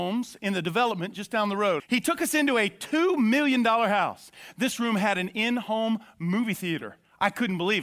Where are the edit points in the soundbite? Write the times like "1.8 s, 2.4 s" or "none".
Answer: 1.8 s, 4.5 s